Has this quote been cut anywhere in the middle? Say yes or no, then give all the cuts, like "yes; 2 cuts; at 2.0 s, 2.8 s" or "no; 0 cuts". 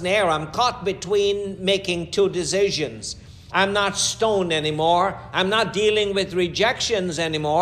yes; 1 cut; at 3.5 s